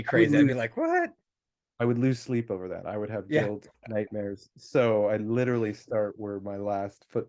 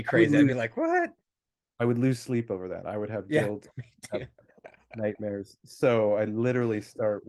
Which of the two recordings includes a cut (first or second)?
first